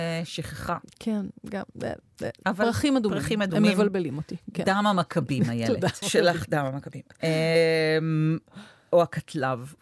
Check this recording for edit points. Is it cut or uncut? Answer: cut